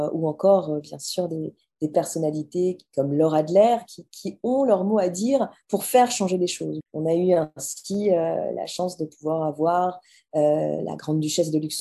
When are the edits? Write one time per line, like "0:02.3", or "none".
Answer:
0:06.8

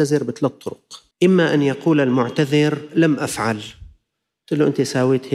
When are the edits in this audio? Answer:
0:01.1

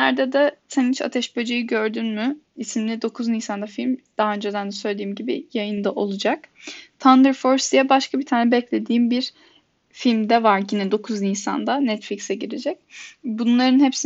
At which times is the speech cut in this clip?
none

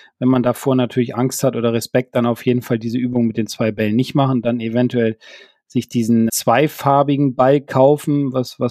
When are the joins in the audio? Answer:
0:06.3

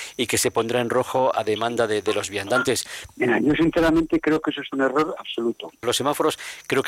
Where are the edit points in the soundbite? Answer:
0:03.1
0:05.8

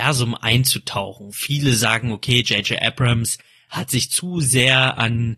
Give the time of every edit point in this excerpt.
none

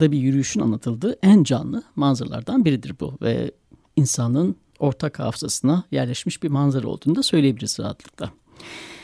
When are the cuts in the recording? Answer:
none

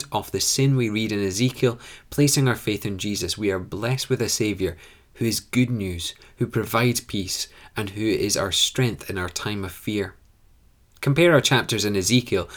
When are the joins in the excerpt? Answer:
none

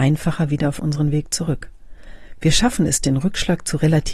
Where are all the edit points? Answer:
none

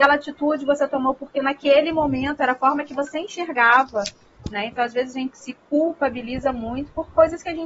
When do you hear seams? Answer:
0:05.3

